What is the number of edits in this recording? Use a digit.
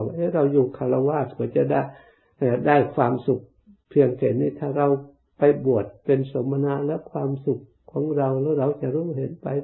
0